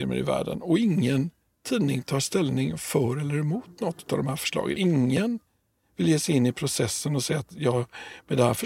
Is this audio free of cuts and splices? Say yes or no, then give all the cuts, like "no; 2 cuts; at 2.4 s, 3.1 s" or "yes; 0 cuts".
yes; 0 cuts